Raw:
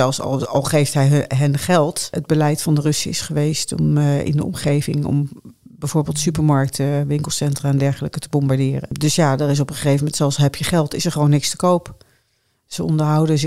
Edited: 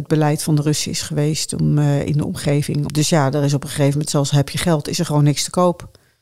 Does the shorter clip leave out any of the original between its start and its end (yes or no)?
yes